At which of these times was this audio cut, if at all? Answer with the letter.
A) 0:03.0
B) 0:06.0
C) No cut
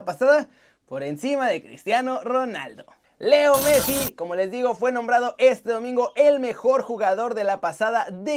C